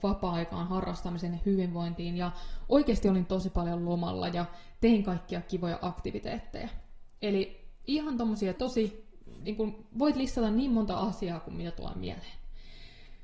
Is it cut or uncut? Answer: cut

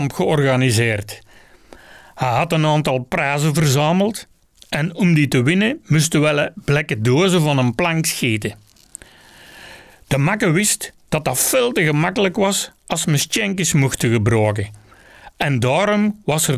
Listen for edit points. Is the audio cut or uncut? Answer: uncut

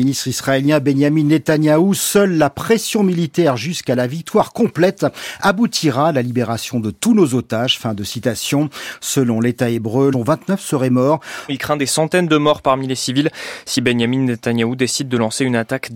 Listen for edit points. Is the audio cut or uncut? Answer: cut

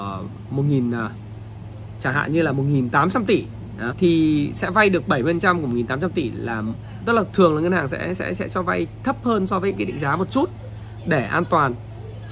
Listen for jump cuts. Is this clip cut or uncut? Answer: cut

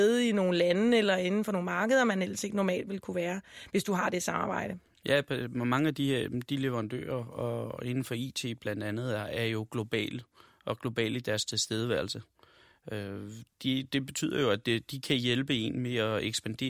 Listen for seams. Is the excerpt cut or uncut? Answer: uncut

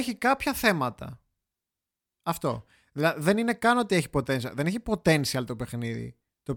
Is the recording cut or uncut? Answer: uncut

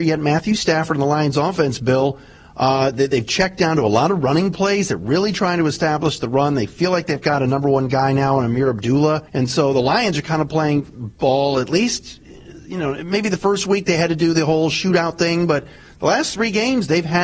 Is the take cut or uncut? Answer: cut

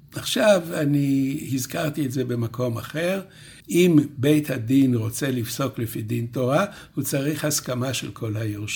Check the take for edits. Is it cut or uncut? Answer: cut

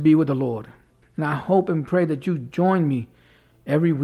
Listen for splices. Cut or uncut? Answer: cut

